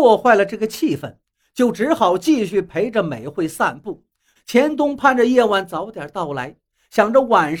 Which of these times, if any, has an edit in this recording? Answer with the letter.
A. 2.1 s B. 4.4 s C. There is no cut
B